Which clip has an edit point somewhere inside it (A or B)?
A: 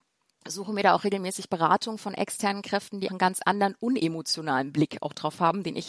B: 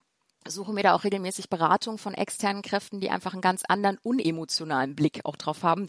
A